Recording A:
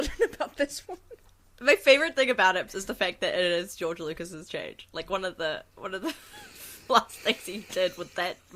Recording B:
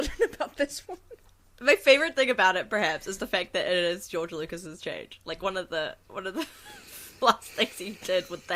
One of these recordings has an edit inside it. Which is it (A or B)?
A